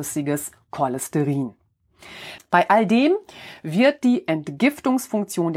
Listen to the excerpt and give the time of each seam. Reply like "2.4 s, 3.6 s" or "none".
2.4 s